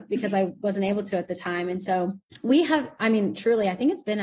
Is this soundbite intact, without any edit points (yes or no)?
yes